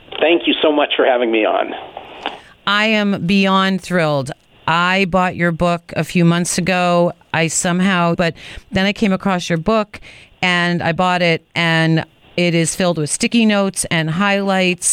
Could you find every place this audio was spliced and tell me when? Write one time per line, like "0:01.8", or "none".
0:08.1